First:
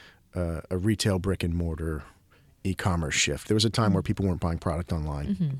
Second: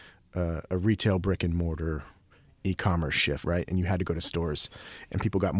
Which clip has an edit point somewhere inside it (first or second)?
second